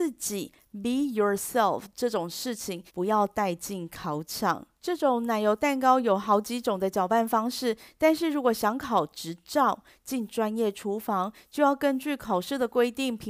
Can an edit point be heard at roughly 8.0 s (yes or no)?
no